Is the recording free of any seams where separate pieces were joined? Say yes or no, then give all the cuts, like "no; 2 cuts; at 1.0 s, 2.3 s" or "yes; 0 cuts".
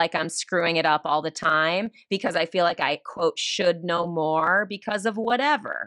yes; 0 cuts